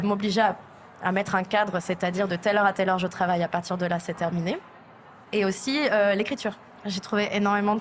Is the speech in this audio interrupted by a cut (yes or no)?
no